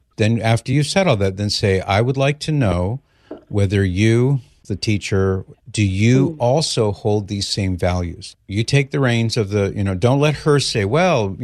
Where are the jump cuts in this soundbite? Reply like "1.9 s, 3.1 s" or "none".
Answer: 5.5 s, 8.3 s